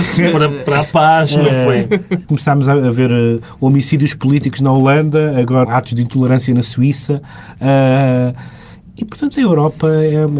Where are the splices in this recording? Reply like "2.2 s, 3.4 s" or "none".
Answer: 2.2 s, 5.6 s